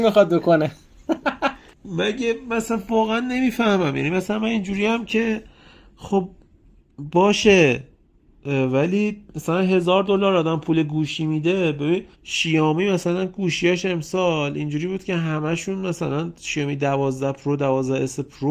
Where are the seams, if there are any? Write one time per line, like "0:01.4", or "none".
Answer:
0:12.1